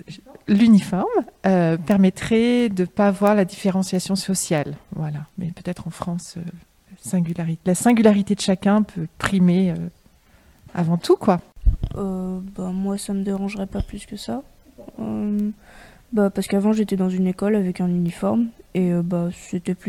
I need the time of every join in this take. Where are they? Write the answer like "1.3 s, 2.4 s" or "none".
none